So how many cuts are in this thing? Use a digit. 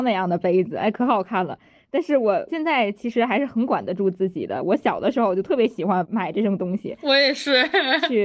0